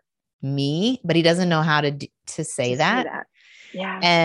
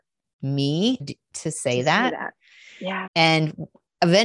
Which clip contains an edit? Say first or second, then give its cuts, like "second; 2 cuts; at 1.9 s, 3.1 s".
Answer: second; 2 cuts; at 1.0 s, 3.1 s